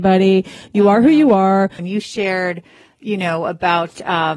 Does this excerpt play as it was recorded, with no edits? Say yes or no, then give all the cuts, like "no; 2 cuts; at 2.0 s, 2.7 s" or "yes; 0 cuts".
no; 1 cut; at 1.8 s